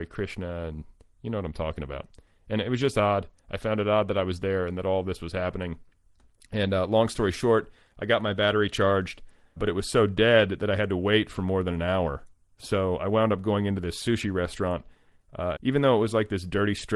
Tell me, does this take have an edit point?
yes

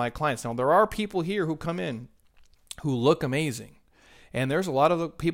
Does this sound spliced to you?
no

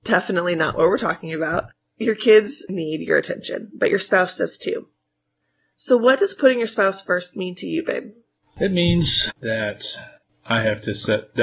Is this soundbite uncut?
yes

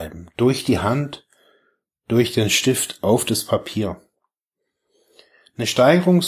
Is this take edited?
no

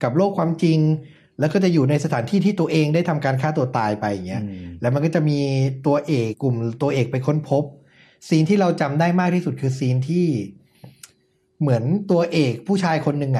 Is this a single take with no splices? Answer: no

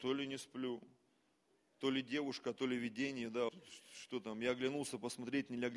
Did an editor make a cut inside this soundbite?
yes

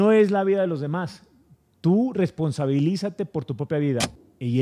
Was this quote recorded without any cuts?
yes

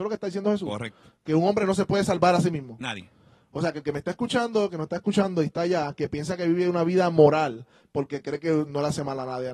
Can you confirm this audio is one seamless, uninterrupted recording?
yes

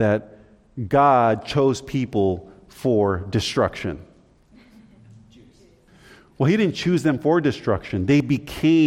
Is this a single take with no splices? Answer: yes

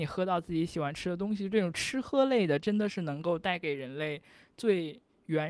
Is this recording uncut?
yes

